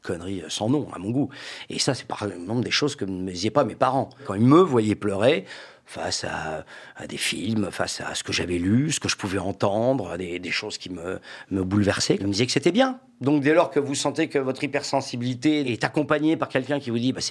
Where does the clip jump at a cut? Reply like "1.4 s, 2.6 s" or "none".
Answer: none